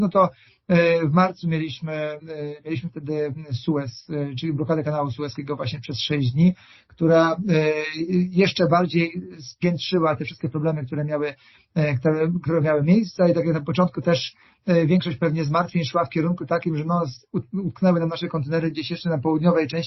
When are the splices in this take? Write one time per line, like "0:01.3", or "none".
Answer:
none

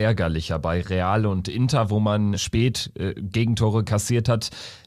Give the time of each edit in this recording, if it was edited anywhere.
0:02.3

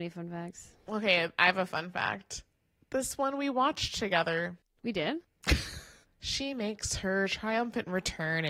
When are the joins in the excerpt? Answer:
0:06.0

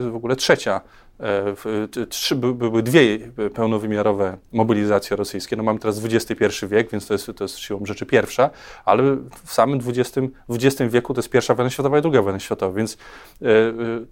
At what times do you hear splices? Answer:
none

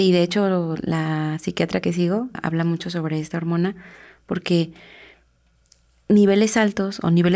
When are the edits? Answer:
0:02.3

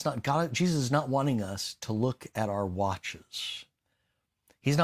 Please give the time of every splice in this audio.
none

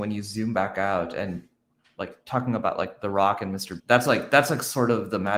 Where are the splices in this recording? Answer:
0:03.8

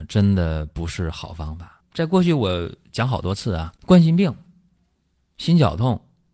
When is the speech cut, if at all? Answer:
0:01.8
0:03.8

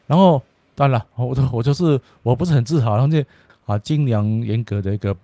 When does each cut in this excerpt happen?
0:03.5

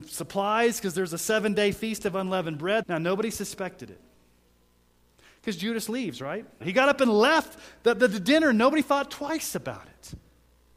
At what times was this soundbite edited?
0:02.8
0:06.6

